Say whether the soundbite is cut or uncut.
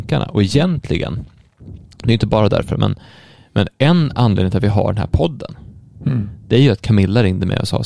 uncut